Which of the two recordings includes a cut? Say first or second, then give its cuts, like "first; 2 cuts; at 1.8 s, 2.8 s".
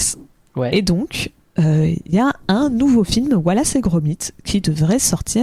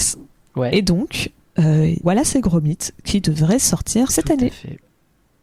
second; 2 cuts; at 2.0 s, 4.1 s